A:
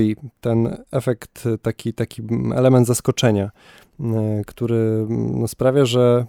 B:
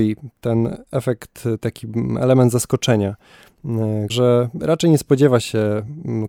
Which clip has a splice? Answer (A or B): B